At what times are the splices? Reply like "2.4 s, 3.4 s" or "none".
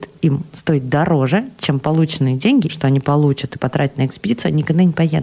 2.7 s